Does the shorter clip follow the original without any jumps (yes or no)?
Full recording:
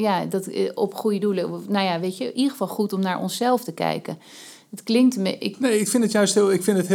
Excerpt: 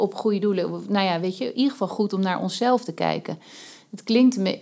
yes